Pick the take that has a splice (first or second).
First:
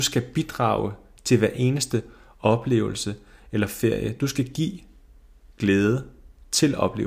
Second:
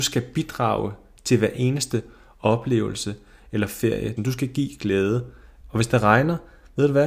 second